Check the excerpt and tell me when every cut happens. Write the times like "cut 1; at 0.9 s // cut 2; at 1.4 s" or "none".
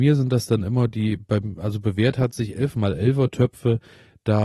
none